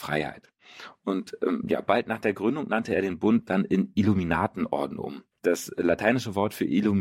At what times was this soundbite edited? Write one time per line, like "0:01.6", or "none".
0:05.4